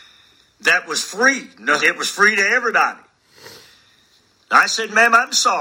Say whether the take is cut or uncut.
cut